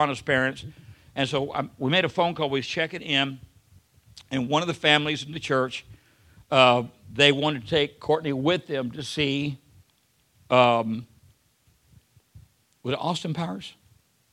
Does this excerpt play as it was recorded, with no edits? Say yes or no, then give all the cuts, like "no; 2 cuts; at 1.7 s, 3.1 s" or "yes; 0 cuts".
yes; 0 cuts